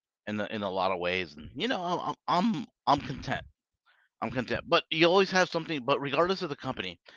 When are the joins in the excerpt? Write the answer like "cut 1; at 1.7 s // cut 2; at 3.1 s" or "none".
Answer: none

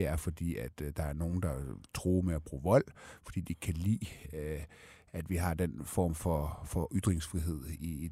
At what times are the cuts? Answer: none

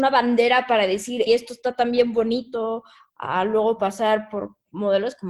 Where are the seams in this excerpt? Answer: cut 1; at 1.3 s

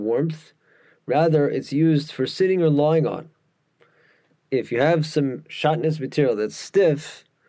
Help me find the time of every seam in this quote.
none

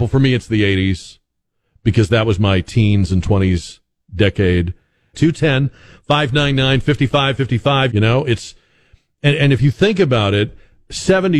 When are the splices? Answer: cut 1; at 5.1 s // cut 2; at 7.9 s // cut 3; at 9.4 s

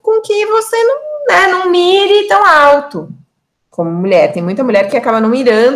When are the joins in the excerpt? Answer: none

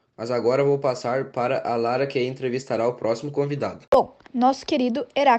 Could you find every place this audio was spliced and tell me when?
cut 1; at 4.3 s

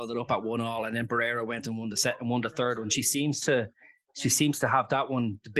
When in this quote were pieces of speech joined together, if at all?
none

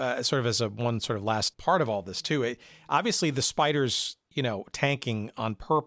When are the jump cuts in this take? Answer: cut 1; at 1.5 s

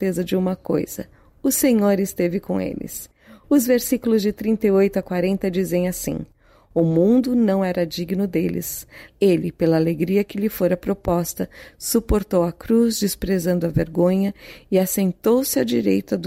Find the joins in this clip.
cut 1; at 9.1 s

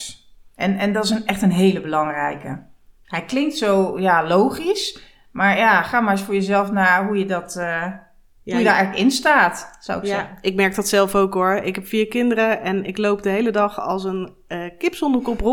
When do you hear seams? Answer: none

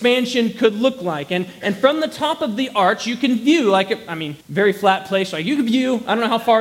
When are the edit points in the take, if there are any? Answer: cut 1; at 4.4 s

